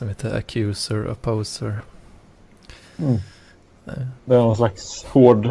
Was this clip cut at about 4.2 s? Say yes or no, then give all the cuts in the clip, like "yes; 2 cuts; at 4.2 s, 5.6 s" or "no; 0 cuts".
yes; 1 cut; at 4.2 s